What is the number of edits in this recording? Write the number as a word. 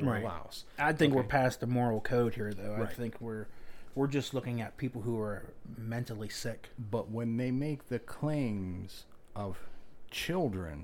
zero